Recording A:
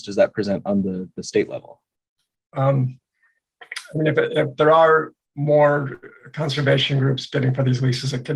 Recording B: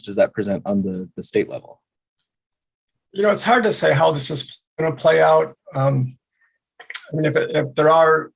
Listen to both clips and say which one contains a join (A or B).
A